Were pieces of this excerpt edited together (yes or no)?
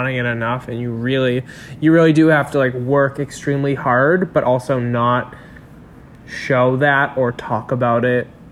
no